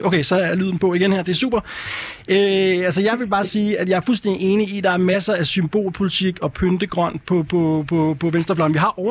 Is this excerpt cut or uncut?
uncut